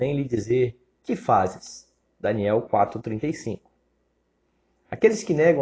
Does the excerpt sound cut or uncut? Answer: uncut